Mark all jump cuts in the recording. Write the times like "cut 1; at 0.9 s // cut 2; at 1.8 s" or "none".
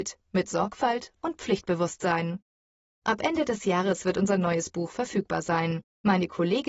none

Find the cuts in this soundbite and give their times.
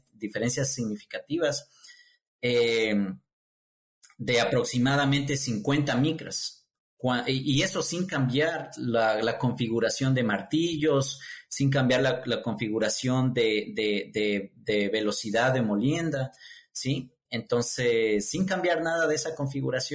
none

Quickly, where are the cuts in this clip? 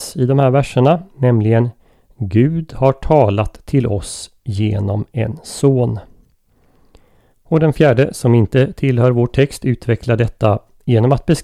cut 1; at 7.3 s

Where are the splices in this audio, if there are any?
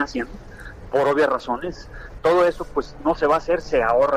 cut 1; at 2.2 s

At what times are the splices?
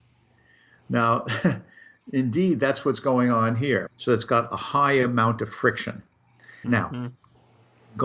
cut 1; at 3.9 s // cut 2; at 6.6 s

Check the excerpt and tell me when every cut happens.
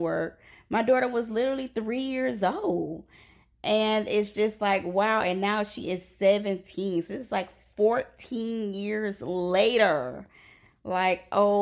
none

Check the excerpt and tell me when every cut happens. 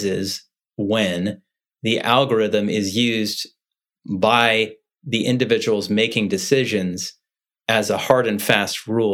none

